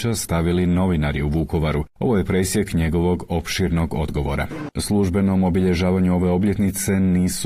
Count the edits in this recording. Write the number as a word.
one